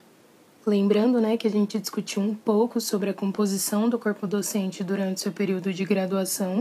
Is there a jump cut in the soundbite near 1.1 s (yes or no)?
no